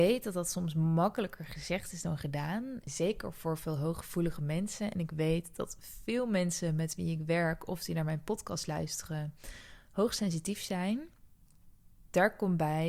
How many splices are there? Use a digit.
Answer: 1